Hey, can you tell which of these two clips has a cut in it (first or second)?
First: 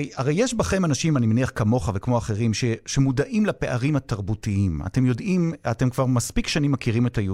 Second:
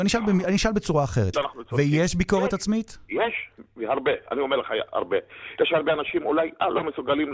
second